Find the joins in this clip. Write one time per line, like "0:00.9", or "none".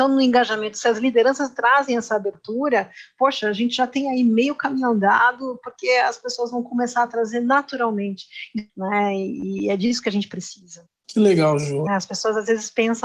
0:08.7
0:11.9